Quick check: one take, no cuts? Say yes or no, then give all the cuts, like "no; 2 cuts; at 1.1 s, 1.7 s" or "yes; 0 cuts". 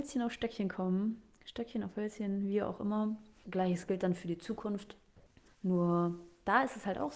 no; 2 cuts; at 3.4 s, 5.5 s